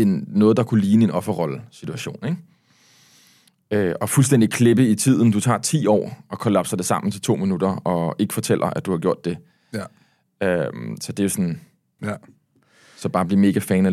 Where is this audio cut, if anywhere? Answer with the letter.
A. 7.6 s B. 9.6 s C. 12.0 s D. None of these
C